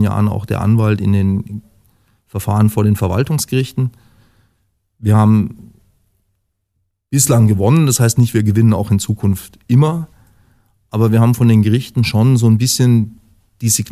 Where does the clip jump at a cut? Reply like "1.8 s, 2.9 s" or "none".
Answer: none